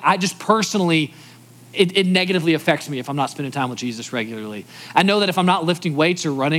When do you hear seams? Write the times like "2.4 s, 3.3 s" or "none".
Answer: none